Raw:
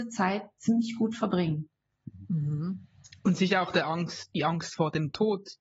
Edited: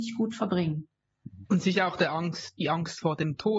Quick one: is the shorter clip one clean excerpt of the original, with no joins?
no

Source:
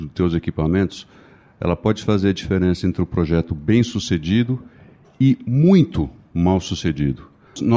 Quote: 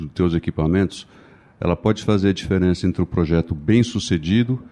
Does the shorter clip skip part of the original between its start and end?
no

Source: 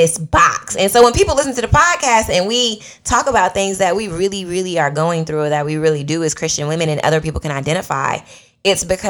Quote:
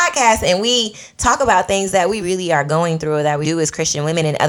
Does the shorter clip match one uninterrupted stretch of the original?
no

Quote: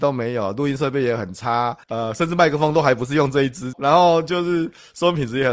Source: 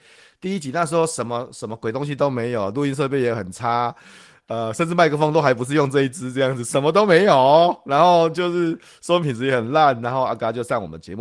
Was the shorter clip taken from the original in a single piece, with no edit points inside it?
no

